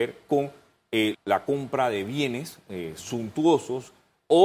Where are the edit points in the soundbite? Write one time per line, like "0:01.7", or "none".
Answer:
0:01.1